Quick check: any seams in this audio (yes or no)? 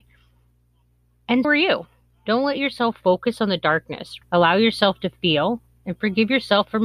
yes